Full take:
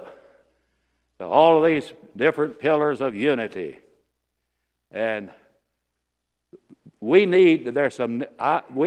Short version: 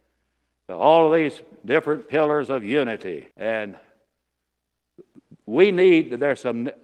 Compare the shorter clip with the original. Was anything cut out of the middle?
yes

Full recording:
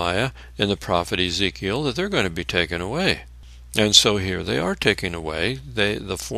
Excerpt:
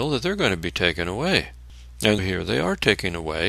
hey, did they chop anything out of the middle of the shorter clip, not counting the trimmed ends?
yes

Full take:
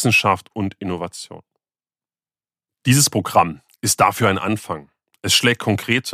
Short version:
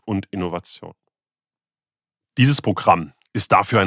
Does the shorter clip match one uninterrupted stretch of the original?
yes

